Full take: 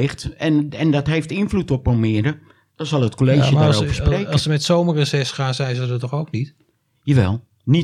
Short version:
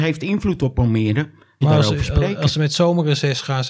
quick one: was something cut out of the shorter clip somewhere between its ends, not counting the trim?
yes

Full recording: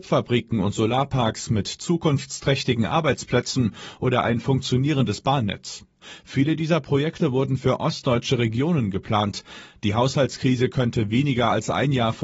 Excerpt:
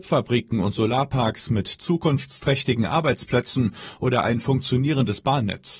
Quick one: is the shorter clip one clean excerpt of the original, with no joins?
yes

